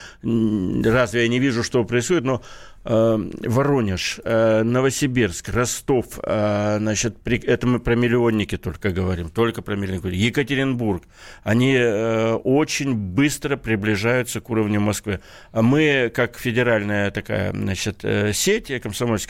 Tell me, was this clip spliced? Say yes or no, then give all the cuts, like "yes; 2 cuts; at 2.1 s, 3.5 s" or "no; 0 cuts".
no; 0 cuts